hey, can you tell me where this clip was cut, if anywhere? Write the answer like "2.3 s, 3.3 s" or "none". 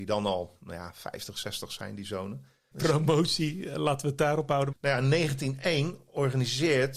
2.7 s, 4.7 s